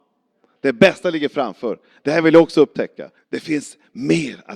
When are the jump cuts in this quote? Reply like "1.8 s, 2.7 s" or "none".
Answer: 3.2 s